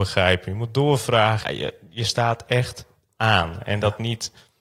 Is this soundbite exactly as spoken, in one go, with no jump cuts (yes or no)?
no